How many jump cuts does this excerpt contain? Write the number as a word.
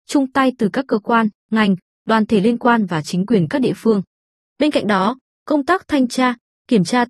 one